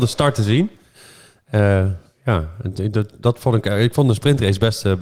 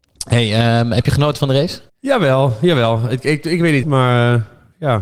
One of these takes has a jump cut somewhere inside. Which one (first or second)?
second